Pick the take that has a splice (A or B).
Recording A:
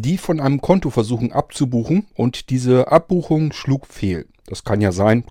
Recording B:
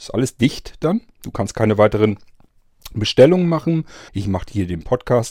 B